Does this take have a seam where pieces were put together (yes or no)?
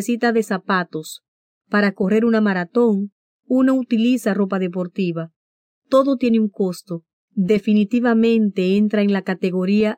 yes